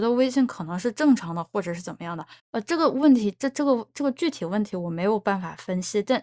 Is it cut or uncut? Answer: cut